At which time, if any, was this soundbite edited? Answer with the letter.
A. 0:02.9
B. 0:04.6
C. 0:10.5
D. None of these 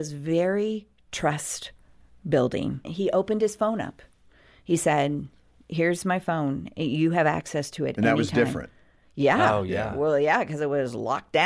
A